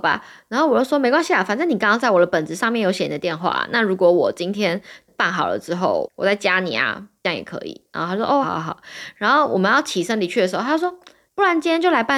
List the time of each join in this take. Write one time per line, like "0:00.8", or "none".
0:08.4